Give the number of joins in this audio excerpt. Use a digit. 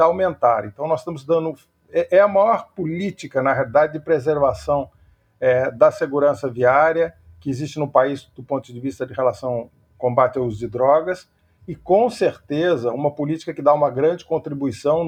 0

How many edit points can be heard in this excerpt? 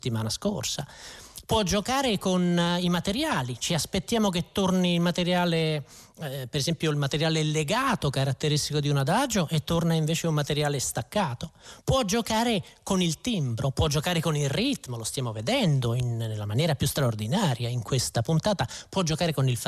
0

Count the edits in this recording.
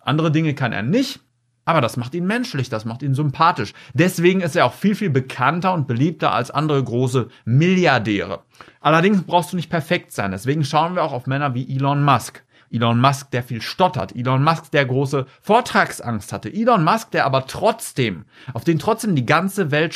1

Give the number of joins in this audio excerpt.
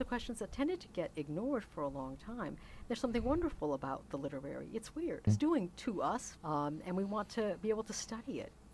2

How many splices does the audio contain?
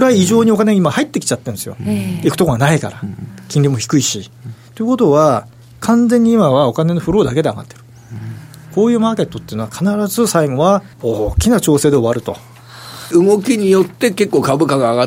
2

